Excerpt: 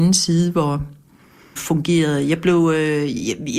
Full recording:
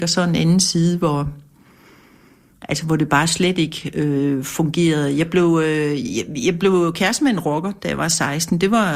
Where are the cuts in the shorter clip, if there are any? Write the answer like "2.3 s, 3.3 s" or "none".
1.6 s

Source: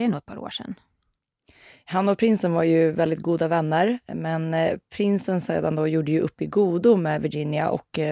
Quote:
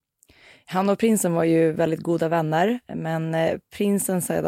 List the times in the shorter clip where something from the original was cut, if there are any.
none

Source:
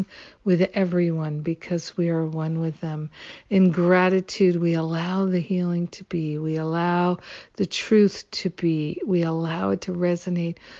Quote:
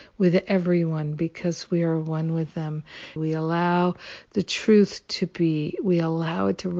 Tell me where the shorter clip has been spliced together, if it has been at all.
3.2 s

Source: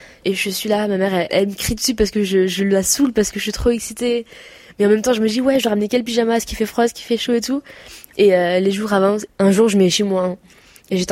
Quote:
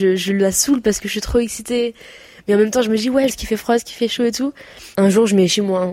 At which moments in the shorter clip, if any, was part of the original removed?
3.3 s, 4.9 s

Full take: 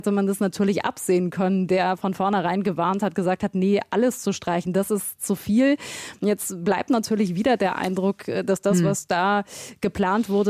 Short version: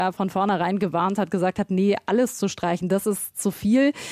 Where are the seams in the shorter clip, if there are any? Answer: none

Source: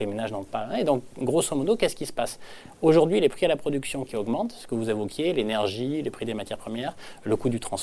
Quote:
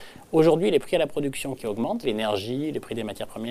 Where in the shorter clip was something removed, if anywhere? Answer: 2.0 s

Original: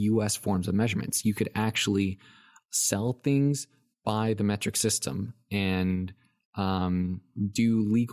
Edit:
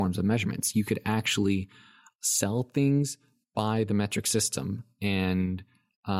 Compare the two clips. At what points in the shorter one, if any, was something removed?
none

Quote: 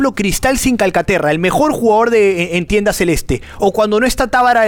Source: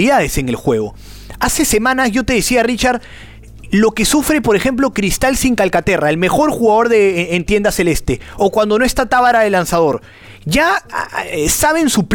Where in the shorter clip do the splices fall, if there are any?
none

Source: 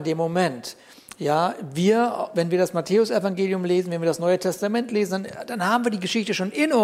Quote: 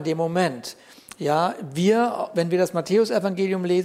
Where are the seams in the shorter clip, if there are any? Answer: none

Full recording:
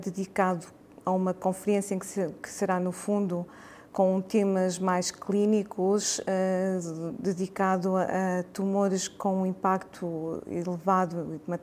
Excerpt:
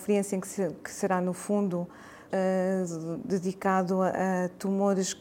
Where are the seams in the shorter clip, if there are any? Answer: 2.3 s

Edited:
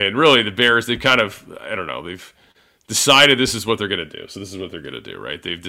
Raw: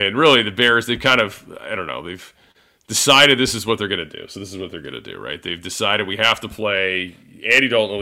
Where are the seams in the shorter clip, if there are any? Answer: none

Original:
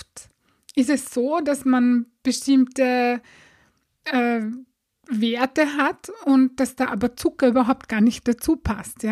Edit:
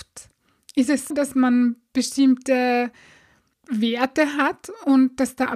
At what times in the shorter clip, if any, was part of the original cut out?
1.1 s, 3.5 s

